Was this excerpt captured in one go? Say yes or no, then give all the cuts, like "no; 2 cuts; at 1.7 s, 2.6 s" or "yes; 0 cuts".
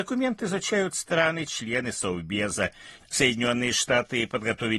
no; 1 cut; at 3.0 s